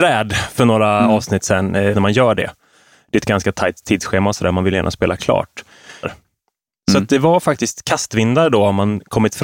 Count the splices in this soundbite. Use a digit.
2